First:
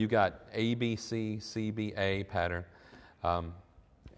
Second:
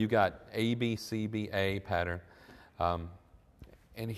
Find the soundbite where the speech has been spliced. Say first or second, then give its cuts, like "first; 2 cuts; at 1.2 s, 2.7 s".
second; 1 cut; at 1.0 s